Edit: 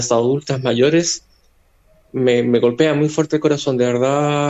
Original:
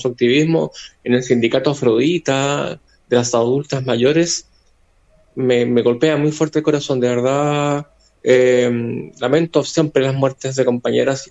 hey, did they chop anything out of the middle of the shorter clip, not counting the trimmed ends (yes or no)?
no